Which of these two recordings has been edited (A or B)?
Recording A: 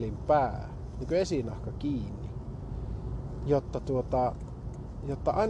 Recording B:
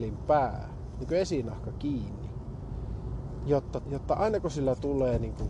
B